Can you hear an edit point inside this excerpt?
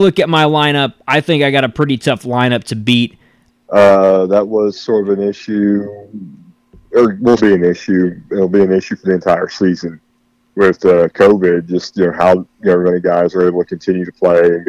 yes; 2 cuts; at 3.5 s, 7.4 s

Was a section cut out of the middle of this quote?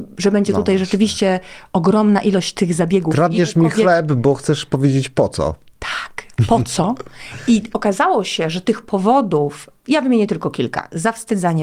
yes; 1 cut; at 9.8 s

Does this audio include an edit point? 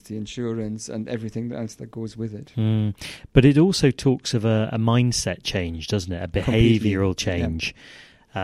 no; 0 cuts

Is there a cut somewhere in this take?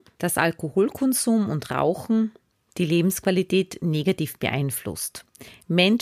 no; 0 cuts

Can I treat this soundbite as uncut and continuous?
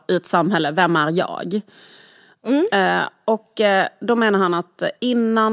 yes; 0 cuts

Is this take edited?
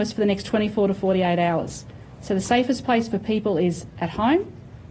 no; 0 cuts

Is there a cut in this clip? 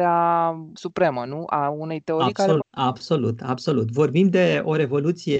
yes; 1 cut; at 2.6 s

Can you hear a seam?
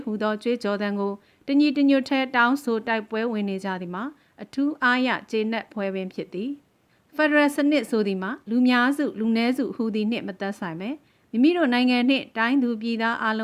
no; 0 cuts

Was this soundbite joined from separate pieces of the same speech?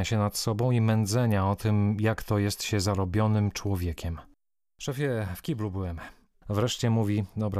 yes; 1 cut; at 6.4 s

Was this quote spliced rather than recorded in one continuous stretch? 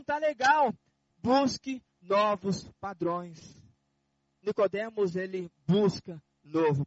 no; 0 cuts

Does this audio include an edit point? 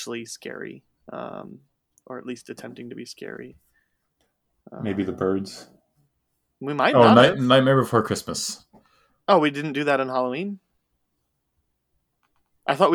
yes; 1 cut; at 6.5 s

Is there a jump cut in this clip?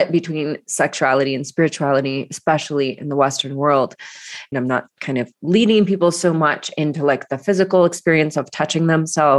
yes; 1 cut; at 4.5 s

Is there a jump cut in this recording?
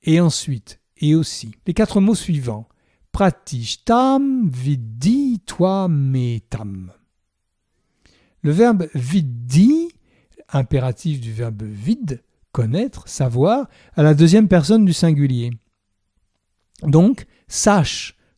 yes; 1 cut; at 1.6 s

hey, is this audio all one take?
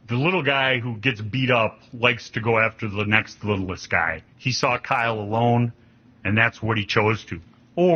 no; 1 cut; at 4.3 s

